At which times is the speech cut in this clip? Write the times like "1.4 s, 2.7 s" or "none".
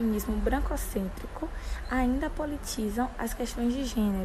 none